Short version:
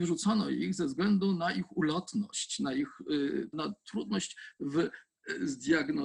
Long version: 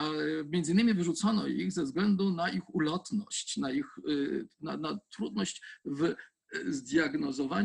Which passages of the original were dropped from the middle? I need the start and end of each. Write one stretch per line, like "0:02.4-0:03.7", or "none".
0:04.5-0:04.8